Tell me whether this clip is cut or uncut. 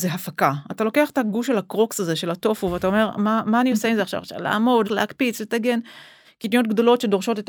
cut